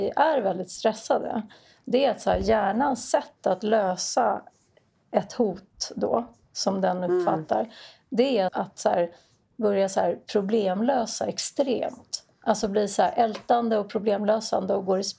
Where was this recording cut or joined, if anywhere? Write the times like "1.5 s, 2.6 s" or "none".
8.5 s